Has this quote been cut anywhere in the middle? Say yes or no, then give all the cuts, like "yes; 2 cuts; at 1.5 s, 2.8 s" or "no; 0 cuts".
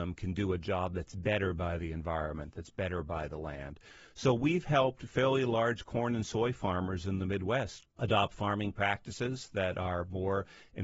no; 0 cuts